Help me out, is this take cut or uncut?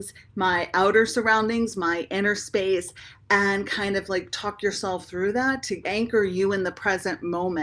cut